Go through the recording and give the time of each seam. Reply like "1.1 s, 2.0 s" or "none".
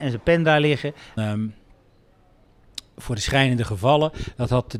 1.2 s